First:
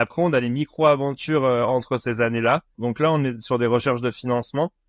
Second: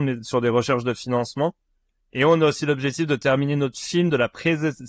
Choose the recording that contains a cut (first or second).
first